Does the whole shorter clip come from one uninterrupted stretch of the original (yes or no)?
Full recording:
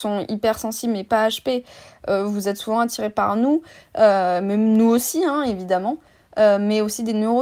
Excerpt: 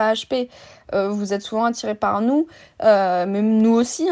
yes